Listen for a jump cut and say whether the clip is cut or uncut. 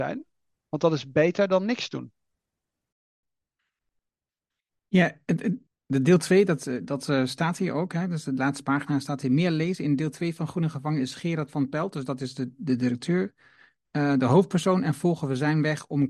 uncut